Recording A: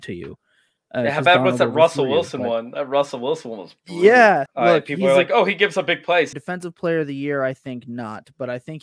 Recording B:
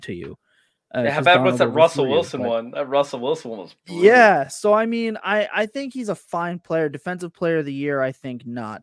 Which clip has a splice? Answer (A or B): A